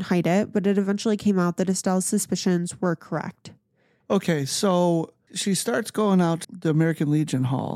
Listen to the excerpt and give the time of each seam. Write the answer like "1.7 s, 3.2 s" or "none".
4.0 s, 5.3 s, 6.4 s